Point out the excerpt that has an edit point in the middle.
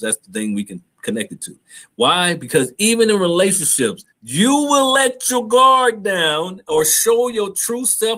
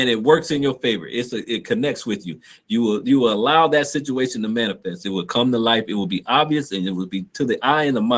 first; 2 cuts; at 1.9 s, 4.1 s

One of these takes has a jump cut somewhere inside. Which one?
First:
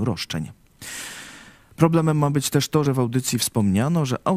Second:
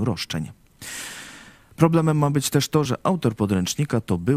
second; 1 cut; at 2.9 s

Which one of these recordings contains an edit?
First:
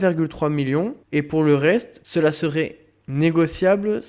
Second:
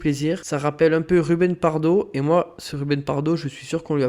first; 2 cuts; at 1.0 s, 2.0 s

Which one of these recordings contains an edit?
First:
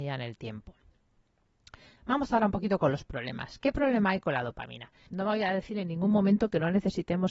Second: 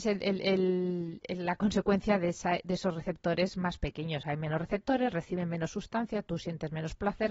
first; 1 cut; at 5.1 s

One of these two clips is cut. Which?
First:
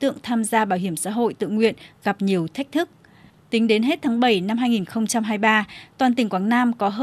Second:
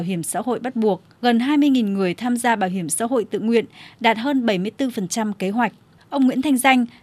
second; 1 cut; at 6.0 s

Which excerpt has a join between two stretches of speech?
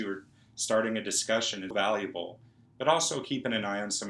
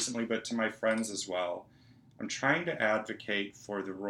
first; 1 cut; at 1.7 s

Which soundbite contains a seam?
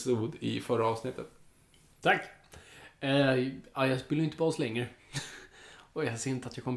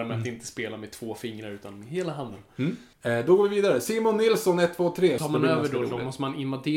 second; 2 cuts; at 2.9 s, 5.2 s

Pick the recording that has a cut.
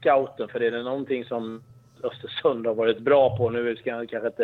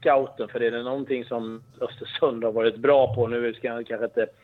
second; 1 cut; at 1.7 s

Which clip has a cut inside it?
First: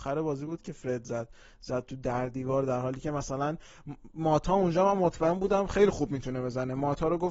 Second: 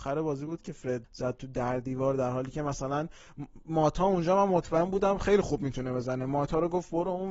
second; 1 cut; at 1.0 s

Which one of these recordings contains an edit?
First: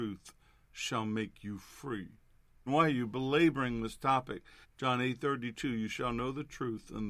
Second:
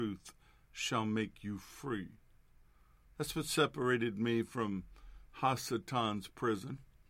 first; 2 cuts; at 2.7 s, 4.6 s

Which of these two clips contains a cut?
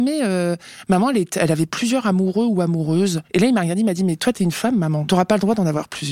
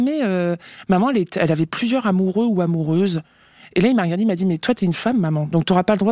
first; 2 cuts; at 3.3 s, 5.1 s

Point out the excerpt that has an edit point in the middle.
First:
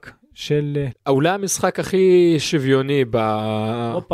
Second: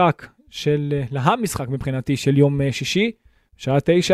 first; 1 cut; at 0.9 s

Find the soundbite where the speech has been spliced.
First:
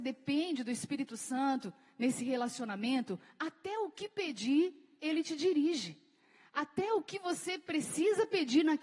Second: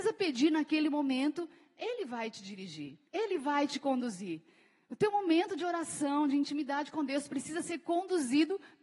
second; 1 cut; at 3.1 s

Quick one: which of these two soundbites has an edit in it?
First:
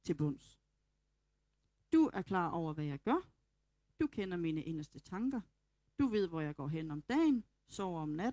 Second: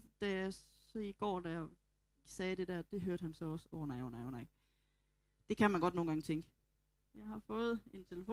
second; 1 cut; at 7.0 s

